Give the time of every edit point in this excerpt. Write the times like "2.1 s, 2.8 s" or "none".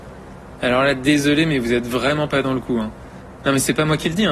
none

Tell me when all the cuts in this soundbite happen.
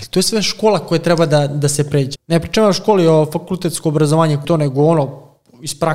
2.1 s, 4.4 s

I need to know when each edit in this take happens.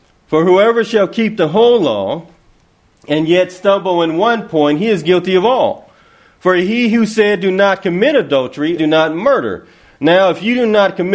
8.8 s

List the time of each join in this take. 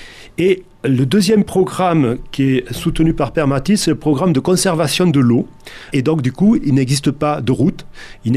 5.9 s

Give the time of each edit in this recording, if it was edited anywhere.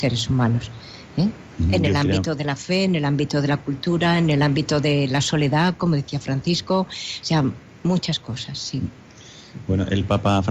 none

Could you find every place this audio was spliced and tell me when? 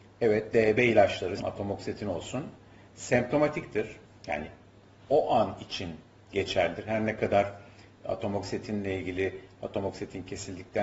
1.4 s

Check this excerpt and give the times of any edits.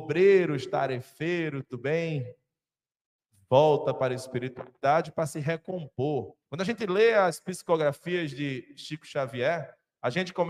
6.4 s

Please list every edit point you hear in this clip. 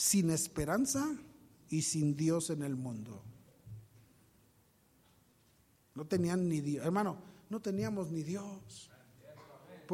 none

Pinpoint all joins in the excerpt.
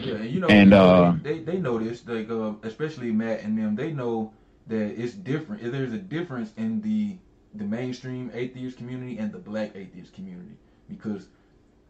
none

